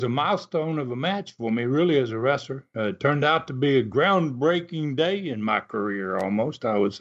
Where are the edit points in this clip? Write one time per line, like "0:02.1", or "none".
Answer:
none